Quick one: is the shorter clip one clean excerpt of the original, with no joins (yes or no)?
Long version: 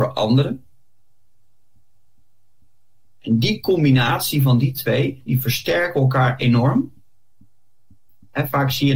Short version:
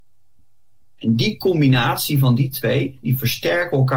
yes